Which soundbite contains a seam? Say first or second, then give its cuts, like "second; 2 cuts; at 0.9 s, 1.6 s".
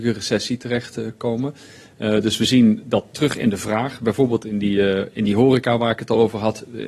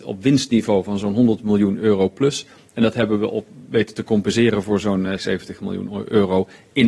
second; 1 cut; at 5.2 s